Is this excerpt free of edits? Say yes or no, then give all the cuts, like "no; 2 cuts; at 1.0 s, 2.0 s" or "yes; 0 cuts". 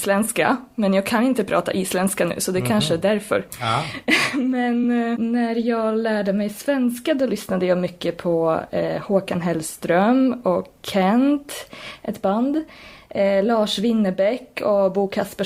yes; 0 cuts